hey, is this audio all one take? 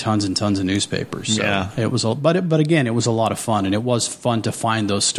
yes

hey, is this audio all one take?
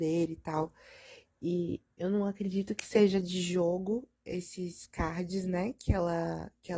yes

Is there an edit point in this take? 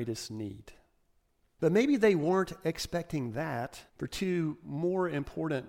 yes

